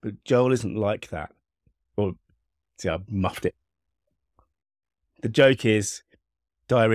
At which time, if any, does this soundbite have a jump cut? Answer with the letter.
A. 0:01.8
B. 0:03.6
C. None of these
A